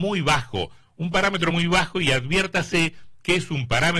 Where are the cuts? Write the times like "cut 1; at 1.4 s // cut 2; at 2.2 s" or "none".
none